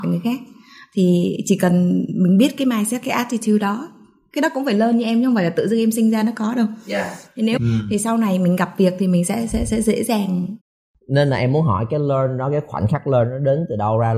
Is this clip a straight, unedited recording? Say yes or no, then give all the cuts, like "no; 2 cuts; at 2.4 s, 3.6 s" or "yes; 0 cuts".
no; 1 cut; at 7.6 s